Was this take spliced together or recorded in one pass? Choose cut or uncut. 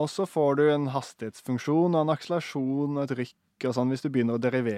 uncut